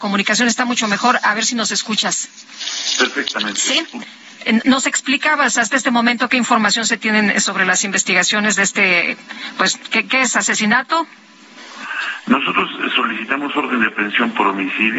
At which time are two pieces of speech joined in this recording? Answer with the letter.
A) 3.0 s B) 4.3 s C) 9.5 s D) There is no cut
D